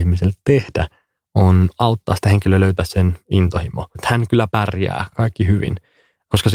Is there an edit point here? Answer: yes; 1 cut; at 4.0 s

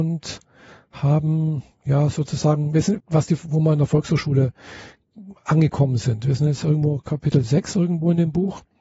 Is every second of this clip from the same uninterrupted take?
no; 1 cut; at 3.0 s

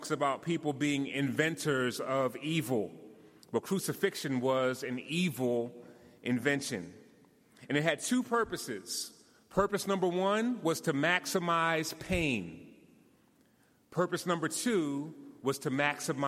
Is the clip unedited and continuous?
yes; 0 cuts

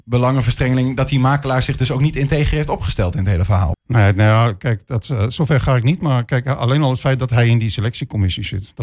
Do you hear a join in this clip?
yes; 1 cut; at 3.7 s

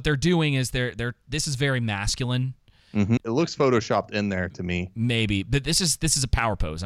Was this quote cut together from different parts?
yes; 1 cut; at 3.2 s

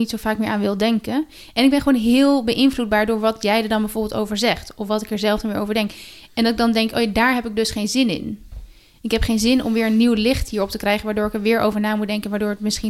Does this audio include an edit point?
no; 0 cuts

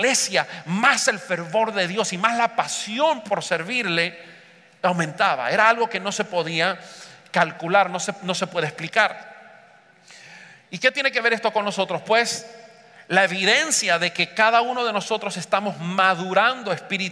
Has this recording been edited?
no; 0 cuts

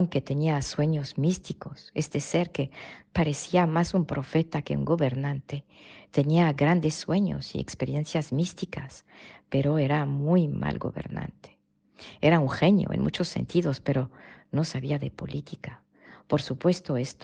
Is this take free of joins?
yes; 0 cuts

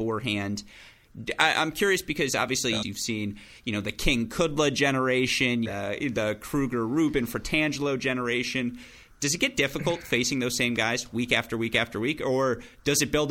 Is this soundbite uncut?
no; 2 cuts; at 2.8 s, 5.7 s

